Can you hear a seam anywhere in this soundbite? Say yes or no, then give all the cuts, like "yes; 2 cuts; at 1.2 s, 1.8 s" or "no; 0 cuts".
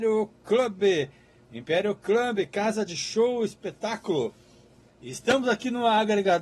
yes; 1 cut; at 4.9 s